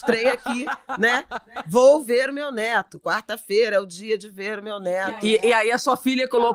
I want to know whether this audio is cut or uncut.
uncut